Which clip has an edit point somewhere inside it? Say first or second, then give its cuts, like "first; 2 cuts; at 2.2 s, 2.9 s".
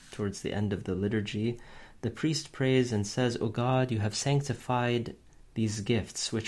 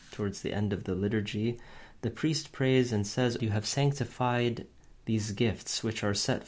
second; 1 cut; at 3.4 s